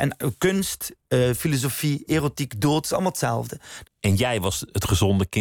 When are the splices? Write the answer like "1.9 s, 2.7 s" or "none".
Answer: 3.8 s